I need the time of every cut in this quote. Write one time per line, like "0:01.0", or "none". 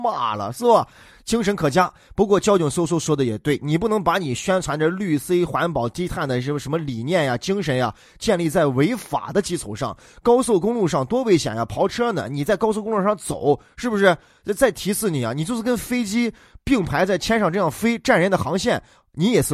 none